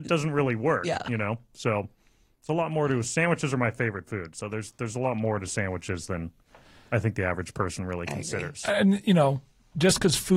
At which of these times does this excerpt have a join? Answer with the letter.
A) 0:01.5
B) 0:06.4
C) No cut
C